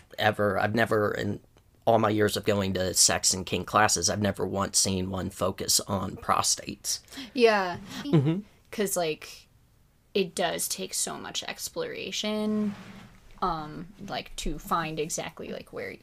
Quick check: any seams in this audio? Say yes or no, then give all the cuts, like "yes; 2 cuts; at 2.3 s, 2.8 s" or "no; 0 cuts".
yes; 1 cut; at 8.0 s